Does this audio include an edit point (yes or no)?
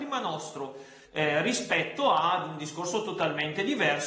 yes